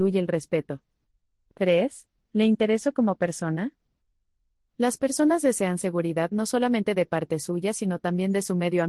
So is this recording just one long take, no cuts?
no; 1 cut; at 1.5 s

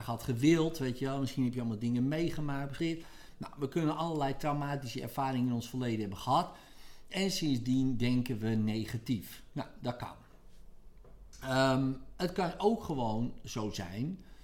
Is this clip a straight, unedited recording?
no; 1 cut; at 2.8 s

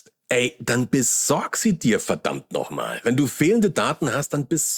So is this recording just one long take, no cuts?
yes; 0 cuts

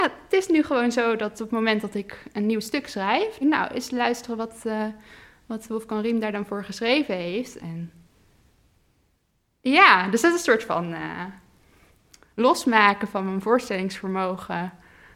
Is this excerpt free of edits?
no; 2 cuts; at 3.4 s, 7.6 s

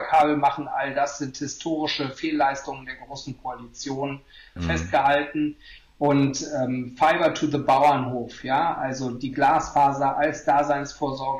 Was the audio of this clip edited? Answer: yes; 1 cut; at 4.6 s

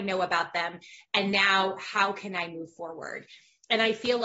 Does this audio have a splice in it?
yes; 1 cut; at 1.0 s

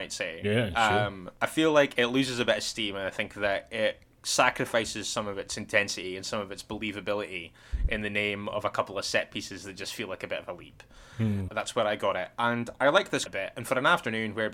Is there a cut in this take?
yes; 2 cuts; at 11.5 s, 13.3 s

